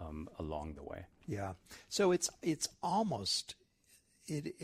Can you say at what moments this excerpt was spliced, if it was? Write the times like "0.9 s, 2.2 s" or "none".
none